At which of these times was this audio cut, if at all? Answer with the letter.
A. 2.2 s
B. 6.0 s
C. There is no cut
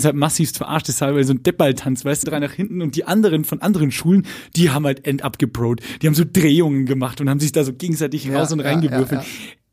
A